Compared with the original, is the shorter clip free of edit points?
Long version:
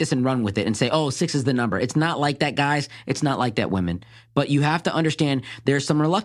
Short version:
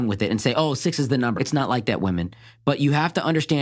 no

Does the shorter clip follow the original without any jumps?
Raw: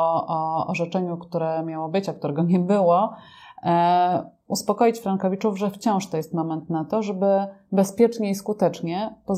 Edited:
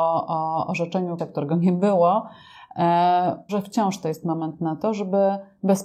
no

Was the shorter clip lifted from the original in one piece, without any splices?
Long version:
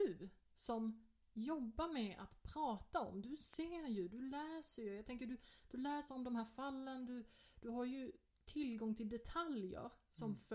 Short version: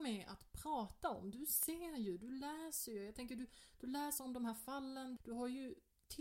no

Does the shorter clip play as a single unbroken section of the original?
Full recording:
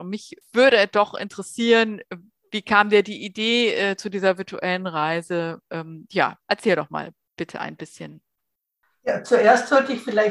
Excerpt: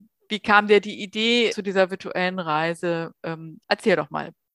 no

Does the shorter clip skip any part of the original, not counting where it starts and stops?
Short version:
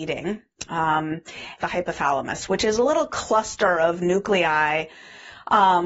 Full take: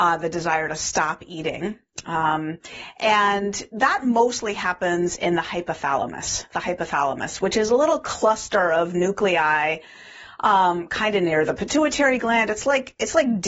yes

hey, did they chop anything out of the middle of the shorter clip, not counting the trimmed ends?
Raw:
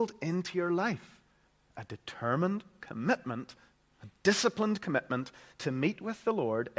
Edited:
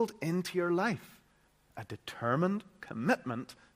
no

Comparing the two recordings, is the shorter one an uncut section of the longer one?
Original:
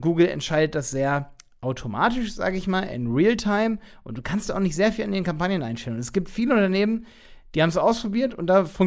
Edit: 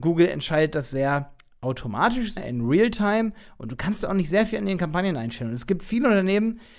no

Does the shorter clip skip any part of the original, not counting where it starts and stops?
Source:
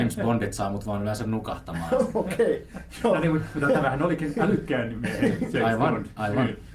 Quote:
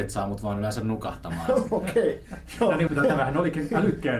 yes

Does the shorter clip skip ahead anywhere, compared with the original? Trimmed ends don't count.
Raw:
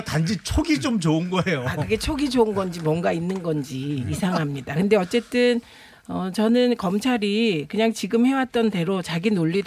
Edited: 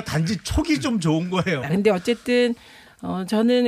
yes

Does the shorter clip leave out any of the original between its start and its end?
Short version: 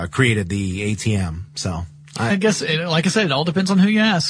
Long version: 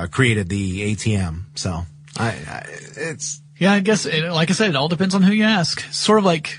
yes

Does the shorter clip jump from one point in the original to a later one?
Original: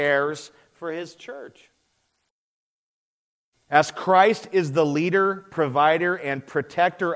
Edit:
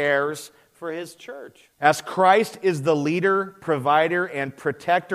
yes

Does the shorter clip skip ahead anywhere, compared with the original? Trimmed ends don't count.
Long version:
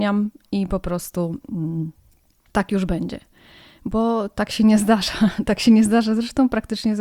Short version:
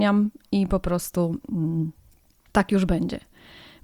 no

